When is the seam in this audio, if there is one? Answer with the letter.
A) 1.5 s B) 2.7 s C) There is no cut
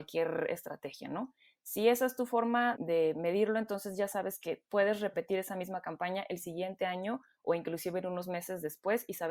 B